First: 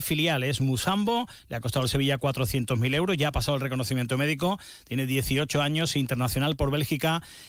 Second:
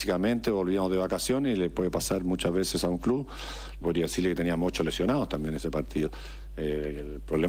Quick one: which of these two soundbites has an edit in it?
second; 1 cut; at 3.8 s

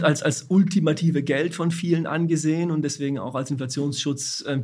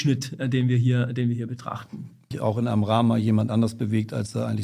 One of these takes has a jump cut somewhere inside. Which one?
second; 1 cut; at 2.3 s

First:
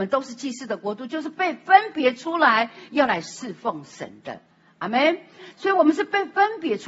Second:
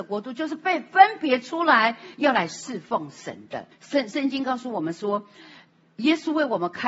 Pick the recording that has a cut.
second; 1 cut; at 3.7 s

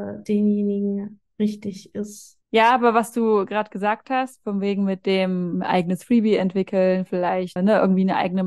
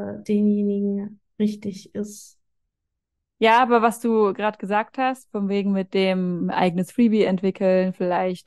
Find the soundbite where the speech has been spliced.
first; 2 cuts; at 2.4 s, 7.6 s

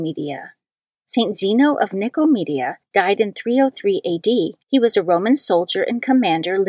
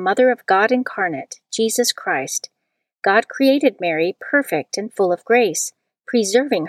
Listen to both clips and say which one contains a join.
first; 2 cuts; at 0.9 s, 4.6 s

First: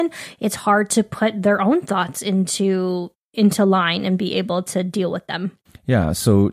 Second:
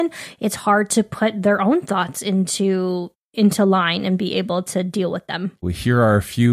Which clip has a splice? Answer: second; 1 cut; at 5.6 s

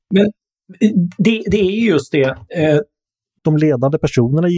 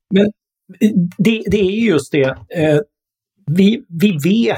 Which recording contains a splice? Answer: first; 1 cut; at 3.4 s

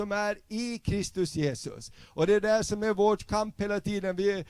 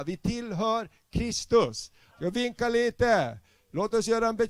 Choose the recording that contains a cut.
second; 1 cut; at 2.1 s

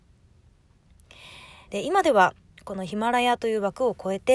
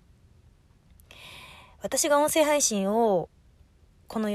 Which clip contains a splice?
first; 1 cut; at 1.6 s

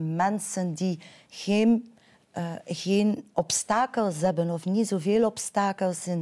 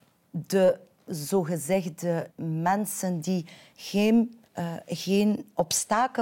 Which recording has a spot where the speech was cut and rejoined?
second; 2 cuts; at 2.3 s, 4.5 s

